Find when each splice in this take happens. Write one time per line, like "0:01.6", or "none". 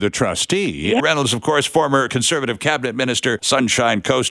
0:01.0
0:03.4